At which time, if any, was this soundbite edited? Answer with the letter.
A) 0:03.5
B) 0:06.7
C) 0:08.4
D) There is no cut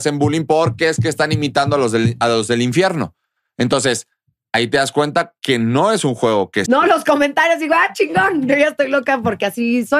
B